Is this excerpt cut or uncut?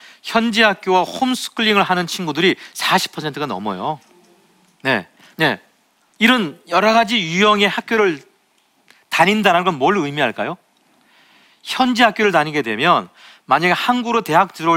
cut